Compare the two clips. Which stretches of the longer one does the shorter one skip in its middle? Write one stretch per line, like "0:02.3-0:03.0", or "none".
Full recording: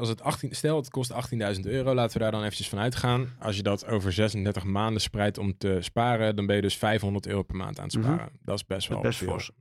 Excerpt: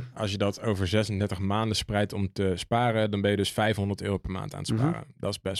none